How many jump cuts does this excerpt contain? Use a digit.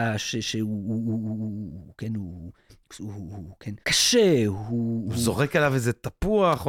1